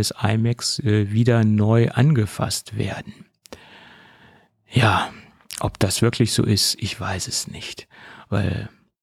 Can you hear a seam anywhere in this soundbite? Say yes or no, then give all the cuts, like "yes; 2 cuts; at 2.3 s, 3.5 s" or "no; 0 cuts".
no; 0 cuts